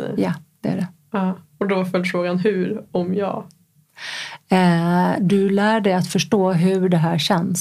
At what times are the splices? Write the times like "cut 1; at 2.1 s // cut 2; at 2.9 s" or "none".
cut 1; at 5.2 s